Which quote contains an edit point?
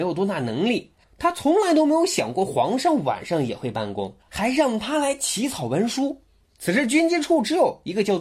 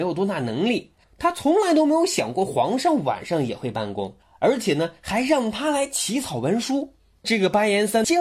first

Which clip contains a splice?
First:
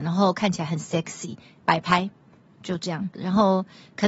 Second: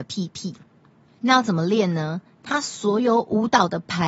first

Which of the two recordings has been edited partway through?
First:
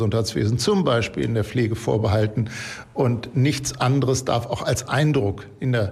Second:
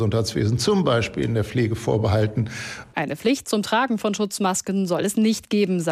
second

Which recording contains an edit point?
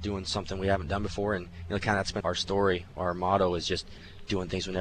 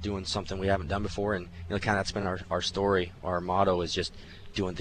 first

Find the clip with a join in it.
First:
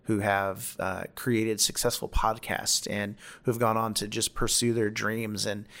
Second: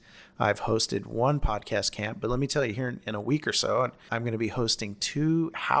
second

